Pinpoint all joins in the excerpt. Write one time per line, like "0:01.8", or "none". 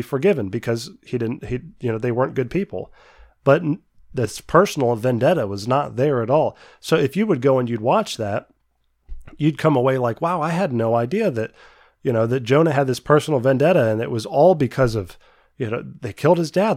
none

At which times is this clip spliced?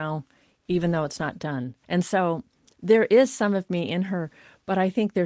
0:01.8

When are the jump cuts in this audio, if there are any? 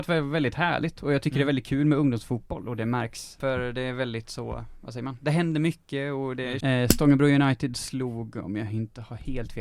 0:06.6

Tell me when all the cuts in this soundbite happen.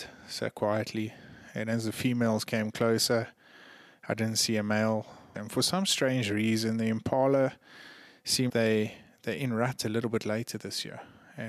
0:05.3
0:08.5

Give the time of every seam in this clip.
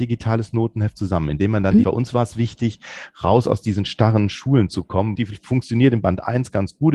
0:01.8
0:05.2

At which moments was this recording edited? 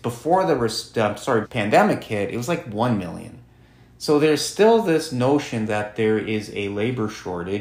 0:01.4

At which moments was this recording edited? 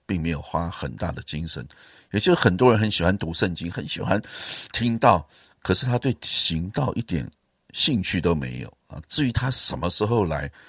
0:03.7
0:09.0

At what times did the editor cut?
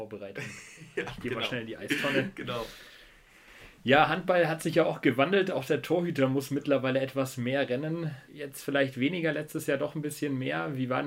0:08.3

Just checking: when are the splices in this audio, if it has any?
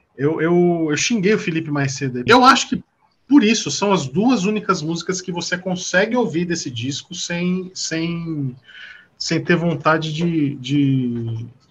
0:02.3

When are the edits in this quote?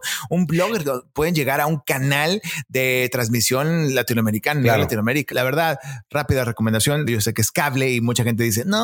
0:05.3
0:07.1

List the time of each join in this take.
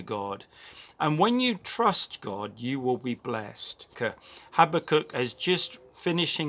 0:03.9

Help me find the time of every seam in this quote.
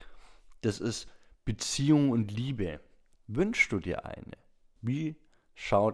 0:03.2
0:04.8

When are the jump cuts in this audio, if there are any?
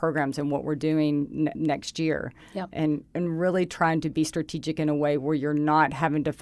0:01.5
0:03.1

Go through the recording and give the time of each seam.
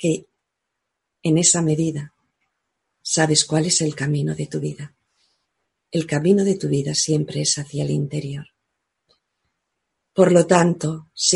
none

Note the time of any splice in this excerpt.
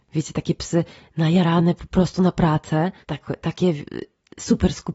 0:03.0

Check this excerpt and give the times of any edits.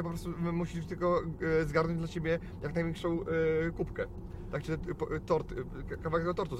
none

